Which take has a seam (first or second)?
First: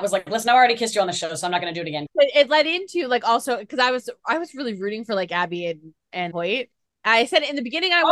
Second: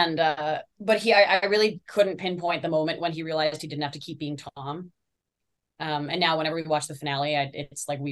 first